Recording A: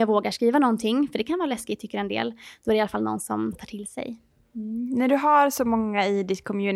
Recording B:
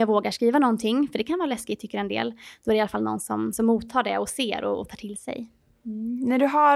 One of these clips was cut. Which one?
A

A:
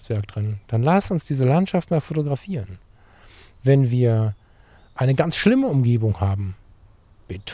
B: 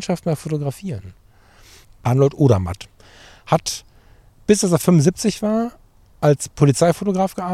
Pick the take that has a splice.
B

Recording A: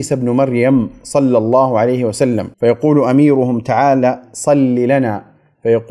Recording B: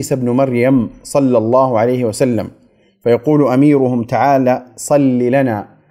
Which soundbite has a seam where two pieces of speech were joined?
A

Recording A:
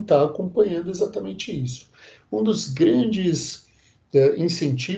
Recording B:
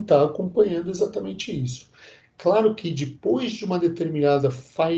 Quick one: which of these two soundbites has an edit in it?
A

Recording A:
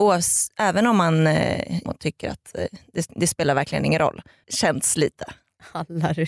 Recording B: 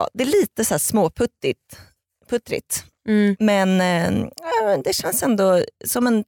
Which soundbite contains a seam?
A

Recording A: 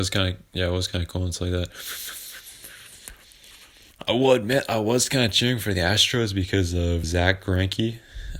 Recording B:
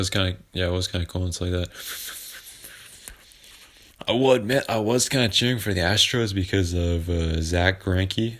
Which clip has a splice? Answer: A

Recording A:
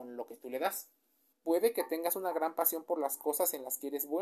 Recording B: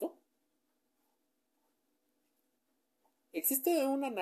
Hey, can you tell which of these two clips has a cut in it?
A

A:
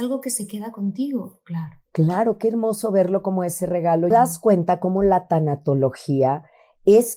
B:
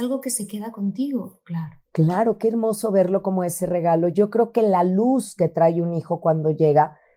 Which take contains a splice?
A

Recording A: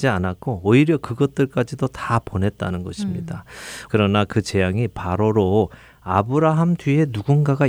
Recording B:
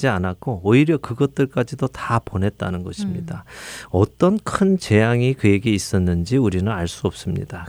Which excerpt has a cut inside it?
A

